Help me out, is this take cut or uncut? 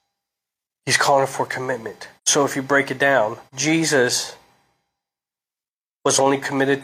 cut